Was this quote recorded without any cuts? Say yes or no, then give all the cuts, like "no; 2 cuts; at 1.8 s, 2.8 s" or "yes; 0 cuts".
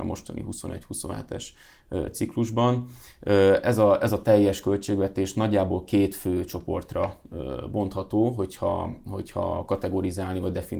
yes; 0 cuts